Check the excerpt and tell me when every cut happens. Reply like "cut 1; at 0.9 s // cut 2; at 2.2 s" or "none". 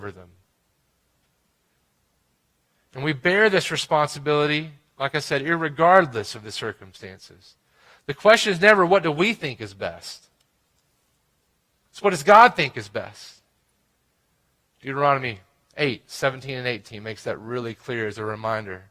none

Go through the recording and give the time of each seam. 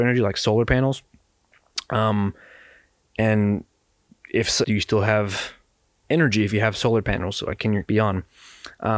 cut 1; at 4.6 s // cut 2; at 7.9 s

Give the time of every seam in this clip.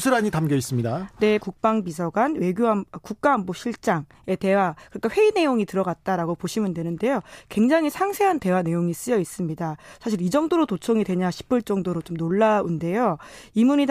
cut 1; at 1.4 s

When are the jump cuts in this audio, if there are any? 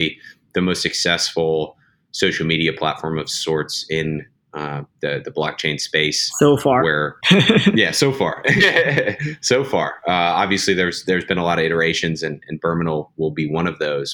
cut 1; at 7.2 s

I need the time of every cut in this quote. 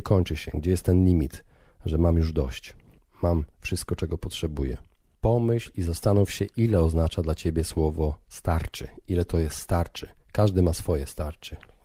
cut 1; at 5.1 s

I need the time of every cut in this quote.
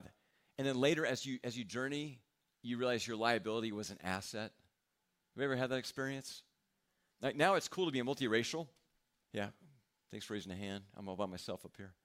cut 1; at 7.1 s // cut 2; at 9.2 s

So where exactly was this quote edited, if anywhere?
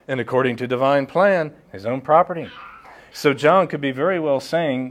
cut 1; at 1.6 s // cut 2; at 3.1 s

